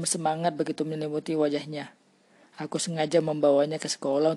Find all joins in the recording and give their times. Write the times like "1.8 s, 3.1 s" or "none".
2.4 s